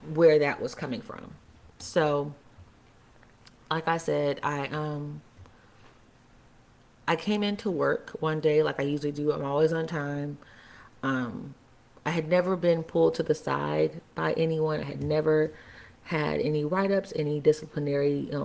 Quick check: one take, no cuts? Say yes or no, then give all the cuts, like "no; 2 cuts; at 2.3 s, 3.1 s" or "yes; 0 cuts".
yes; 0 cuts